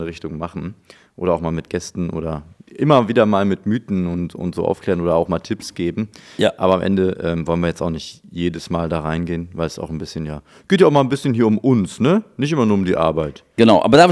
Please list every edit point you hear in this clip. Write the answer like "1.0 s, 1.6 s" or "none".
none